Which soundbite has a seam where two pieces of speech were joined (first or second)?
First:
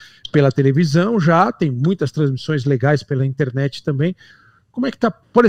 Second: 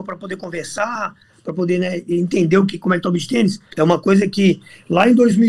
second